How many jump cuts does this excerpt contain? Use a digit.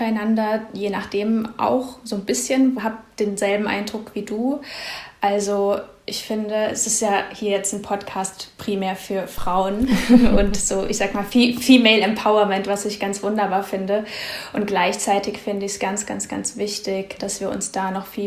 2